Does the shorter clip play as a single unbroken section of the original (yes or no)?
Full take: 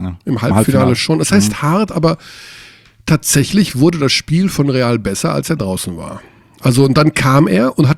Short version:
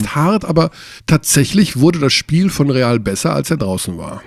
no